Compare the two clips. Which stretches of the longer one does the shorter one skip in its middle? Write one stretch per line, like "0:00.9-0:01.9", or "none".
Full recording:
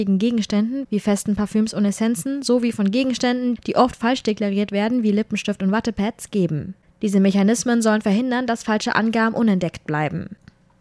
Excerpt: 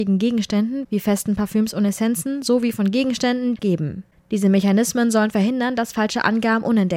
0:03.6-0:06.3

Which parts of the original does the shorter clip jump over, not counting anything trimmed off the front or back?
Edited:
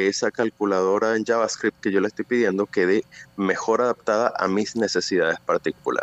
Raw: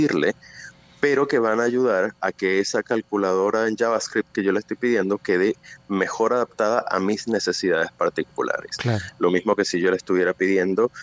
none

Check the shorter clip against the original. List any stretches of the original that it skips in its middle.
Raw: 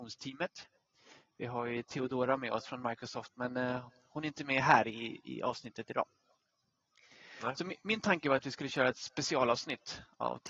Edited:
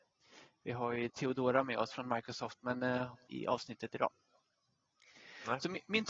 0:04.0-0:05.2

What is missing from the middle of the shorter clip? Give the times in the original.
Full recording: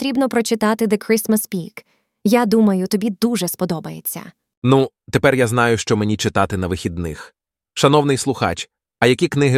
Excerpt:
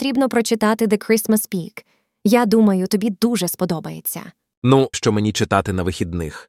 0:04.9-0:05.8

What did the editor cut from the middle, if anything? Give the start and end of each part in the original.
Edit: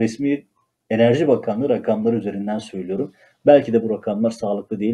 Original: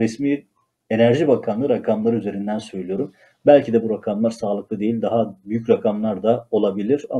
none

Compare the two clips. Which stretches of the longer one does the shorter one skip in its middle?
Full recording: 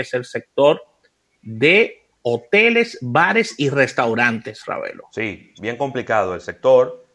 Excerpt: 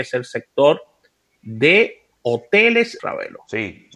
0:03.0-0:04.6

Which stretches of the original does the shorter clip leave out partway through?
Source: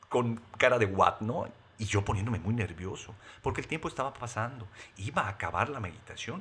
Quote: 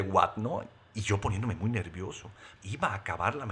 0:03.4-0:04.9

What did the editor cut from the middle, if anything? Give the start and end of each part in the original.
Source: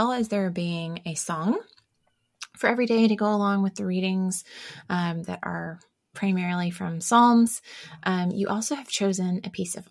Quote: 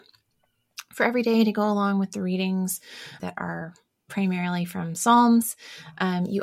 0:04.8-0:05.3

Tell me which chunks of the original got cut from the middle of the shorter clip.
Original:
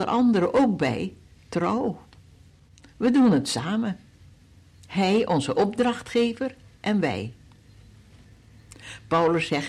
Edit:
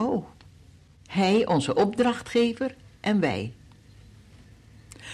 0:02.8-0:04.8

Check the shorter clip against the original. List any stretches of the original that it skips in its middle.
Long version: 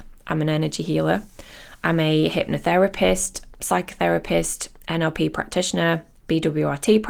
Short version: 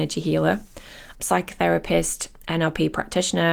0:01.8-0:03.5

